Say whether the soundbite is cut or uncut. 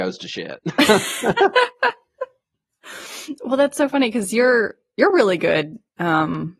uncut